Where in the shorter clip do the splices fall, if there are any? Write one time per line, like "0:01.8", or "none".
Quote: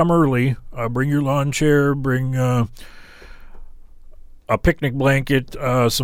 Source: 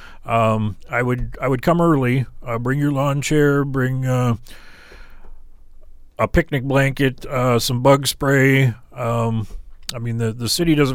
none